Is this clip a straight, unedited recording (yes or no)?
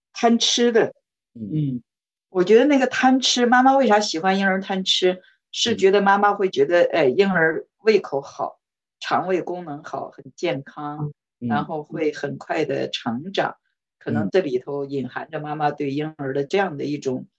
yes